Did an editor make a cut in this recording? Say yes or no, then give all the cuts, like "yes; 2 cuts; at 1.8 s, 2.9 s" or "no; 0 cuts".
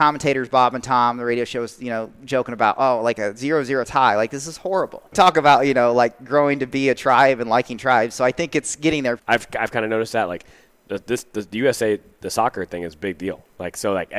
yes; 2 cuts; at 5.1 s, 9.2 s